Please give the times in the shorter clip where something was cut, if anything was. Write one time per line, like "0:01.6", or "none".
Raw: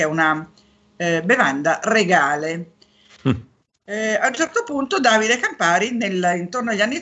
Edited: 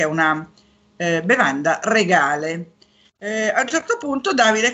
0:03.1